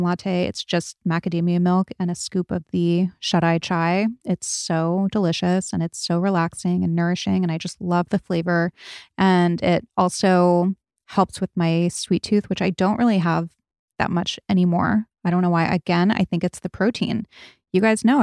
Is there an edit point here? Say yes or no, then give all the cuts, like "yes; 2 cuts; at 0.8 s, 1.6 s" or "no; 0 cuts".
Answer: no; 0 cuts